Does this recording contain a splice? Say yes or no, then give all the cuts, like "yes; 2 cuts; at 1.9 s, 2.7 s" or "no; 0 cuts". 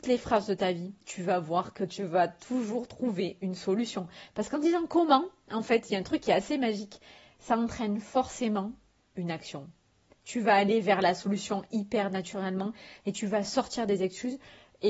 no; 0 cuts